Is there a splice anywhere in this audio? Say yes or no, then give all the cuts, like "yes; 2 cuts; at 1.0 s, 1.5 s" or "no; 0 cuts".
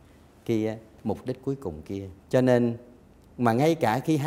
yes; 1 cut; at 2.2 s